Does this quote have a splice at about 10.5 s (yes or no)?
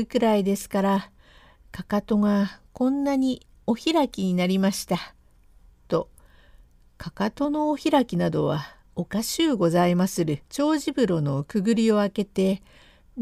yes